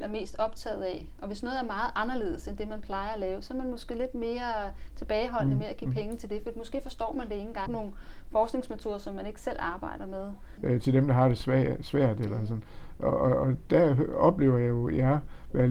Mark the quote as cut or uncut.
cut